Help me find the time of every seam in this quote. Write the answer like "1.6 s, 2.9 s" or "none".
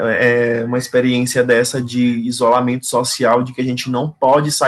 none